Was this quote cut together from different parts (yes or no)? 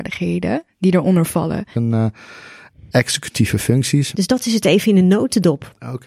yes